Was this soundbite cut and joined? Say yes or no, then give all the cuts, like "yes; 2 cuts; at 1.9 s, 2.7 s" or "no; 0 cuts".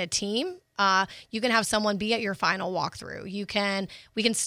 no; 0 cuts